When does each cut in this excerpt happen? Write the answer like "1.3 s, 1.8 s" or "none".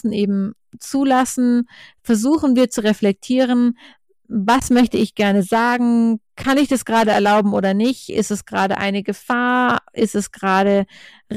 none